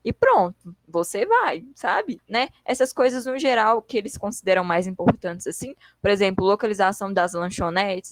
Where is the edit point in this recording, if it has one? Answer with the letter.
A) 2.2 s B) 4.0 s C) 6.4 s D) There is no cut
A